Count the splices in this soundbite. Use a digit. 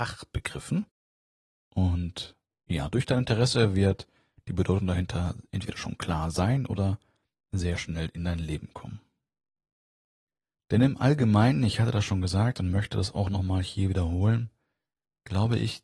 0